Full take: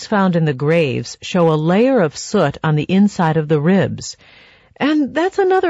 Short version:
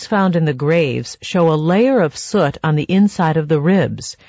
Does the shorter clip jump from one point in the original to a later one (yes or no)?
no